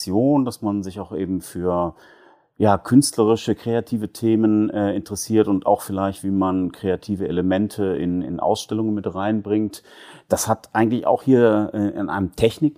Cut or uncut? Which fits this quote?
uncut